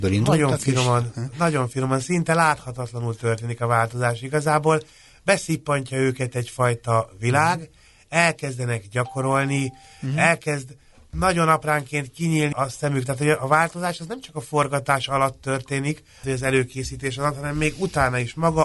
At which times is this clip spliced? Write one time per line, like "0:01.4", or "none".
0:12.5
0:16.2